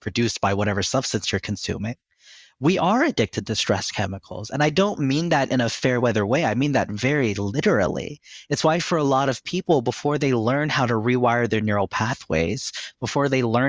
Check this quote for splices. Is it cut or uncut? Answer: uncut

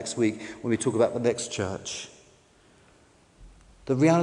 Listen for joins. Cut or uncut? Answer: uncut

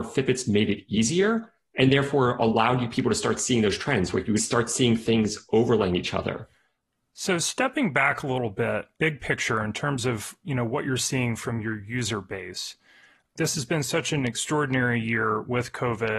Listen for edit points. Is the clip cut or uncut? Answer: cut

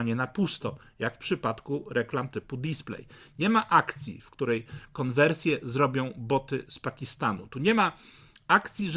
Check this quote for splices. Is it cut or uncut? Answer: uncut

